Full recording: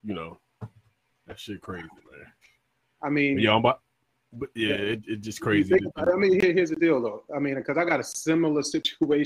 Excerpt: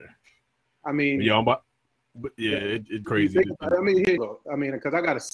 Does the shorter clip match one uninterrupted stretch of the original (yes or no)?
no